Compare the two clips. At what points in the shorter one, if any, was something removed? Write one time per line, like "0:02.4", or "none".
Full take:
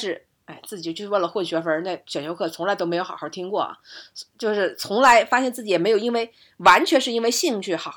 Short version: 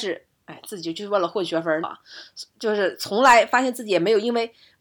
0:01.8

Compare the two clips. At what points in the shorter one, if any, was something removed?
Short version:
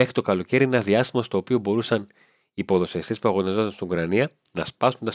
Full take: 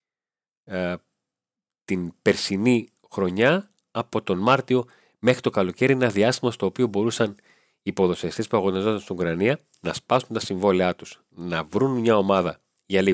none

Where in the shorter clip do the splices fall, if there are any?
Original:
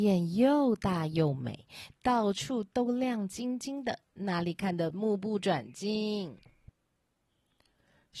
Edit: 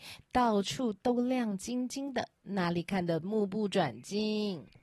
none

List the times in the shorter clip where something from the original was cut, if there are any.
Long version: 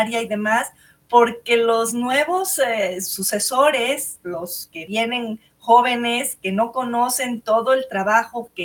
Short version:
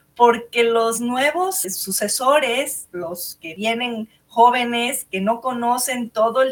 0:01.6

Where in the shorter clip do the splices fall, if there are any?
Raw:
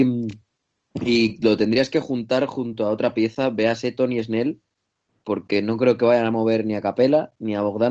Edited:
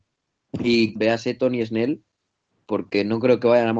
0:01.0

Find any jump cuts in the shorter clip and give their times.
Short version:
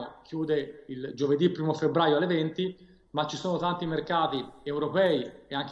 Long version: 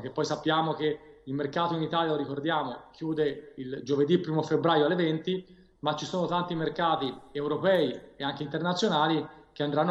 none

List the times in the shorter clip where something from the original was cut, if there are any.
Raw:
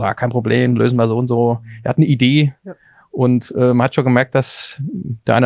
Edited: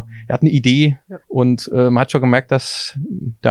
0:01.2

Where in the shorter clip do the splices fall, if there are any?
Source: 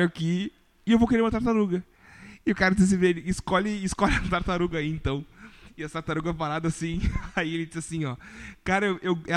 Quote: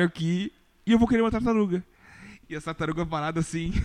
0:02.4

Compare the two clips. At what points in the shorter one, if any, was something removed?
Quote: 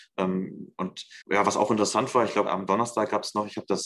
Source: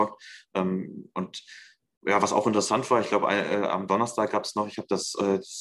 0:01.2
0:02.5

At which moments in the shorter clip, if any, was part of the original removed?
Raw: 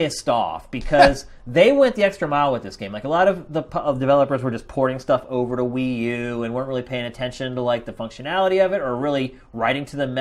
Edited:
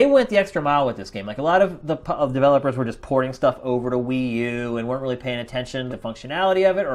0:05.9

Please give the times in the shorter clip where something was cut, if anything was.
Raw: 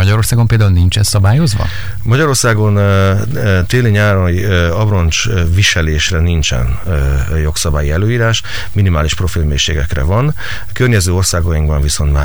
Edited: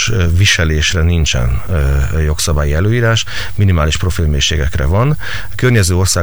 none

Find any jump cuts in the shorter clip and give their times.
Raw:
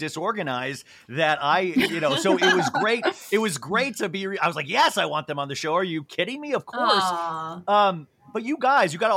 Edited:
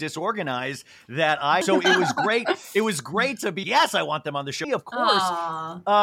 0:01.6
0:03.6
0:04.6

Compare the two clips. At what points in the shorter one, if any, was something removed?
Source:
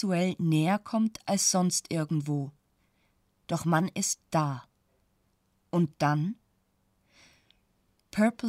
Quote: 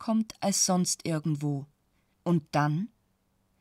0:02.1

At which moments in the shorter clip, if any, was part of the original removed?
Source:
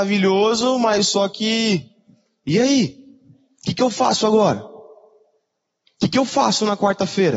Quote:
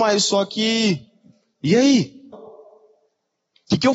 0:02.3

